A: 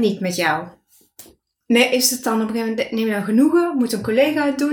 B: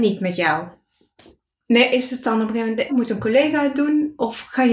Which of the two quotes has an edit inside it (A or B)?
B